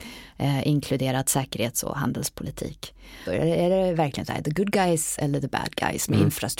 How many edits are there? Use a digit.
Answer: 1